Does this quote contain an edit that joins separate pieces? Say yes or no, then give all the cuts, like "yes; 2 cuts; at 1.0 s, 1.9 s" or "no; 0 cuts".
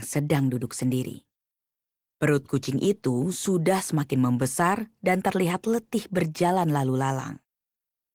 no; 0 cuts